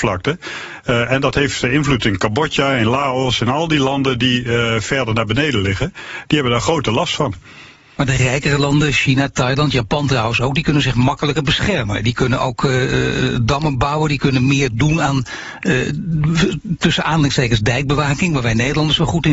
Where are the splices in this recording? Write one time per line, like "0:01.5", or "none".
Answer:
none